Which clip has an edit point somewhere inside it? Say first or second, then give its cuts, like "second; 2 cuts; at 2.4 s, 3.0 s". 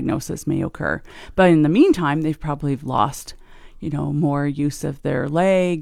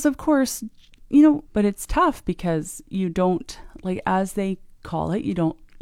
second; 1 cut; at 1.5 s